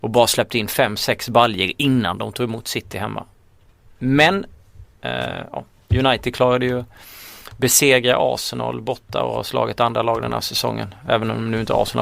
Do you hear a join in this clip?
no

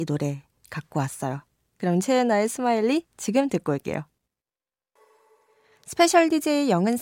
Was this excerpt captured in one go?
yes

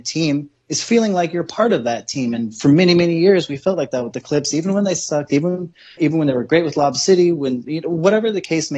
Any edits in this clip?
yes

